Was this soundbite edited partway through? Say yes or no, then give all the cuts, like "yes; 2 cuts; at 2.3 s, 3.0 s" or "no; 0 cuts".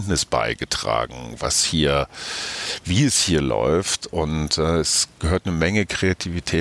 no; 0 cuts